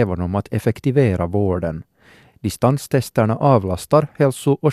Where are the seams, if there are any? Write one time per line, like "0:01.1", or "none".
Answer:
none